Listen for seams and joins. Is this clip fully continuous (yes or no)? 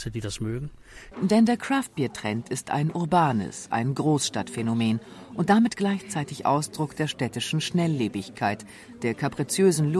no